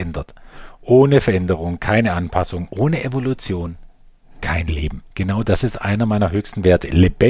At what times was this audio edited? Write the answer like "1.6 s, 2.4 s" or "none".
2.7 s, 5.1 s